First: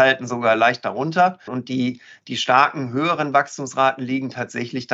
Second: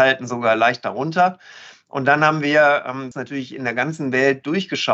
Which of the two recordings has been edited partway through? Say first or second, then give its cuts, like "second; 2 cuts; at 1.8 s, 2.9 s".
first; 1 cut; at 1.5 s